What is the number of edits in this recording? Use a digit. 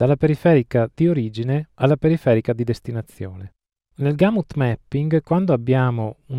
1